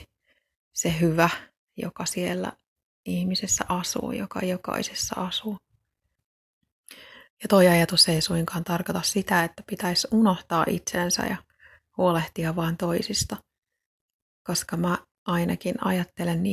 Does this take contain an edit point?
no; 0 cuts

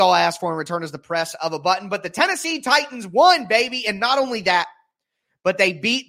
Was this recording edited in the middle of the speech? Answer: no; 0 cuts

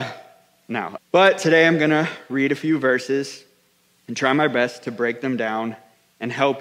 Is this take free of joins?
no; 1 cut; at 1.0 s

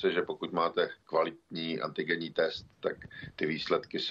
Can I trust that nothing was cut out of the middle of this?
yes; 0 cuts

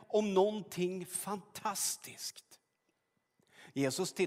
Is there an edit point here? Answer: no; 0 cuts

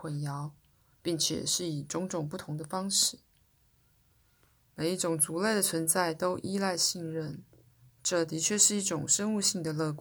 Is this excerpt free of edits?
yes; 0 cuts

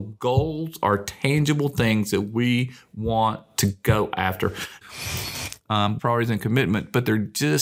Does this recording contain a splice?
yes; 2 cuts; at 4.8 s, 6.0 s

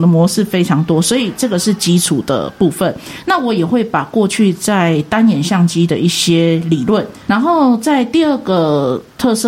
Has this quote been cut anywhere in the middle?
yes; 1 cut; at 7.3 s

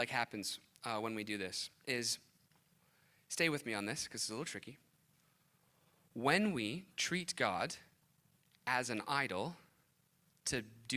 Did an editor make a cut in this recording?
no; 0 cuts

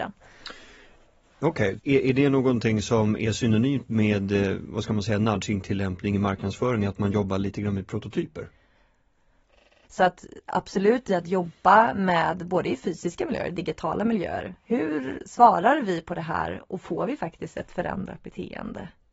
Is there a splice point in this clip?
yes; 2 cuts; at 1.8 s, 9.8 s

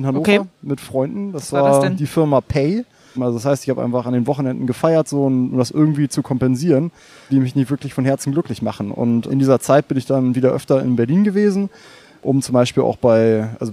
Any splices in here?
yes; 3 cuts; at 3.1 s, 7.3 s, 9.3 s

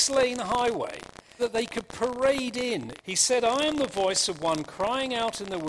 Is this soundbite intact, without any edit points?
no; 2 cuts; at 1.4 s, 3.0 s

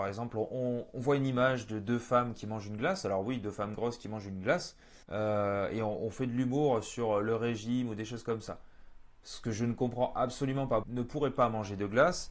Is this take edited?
yes; 2 cuts; at 5.0 s, 10.8 s

